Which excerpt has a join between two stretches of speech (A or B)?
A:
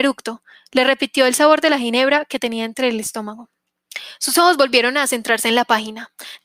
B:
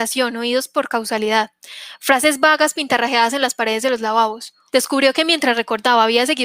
B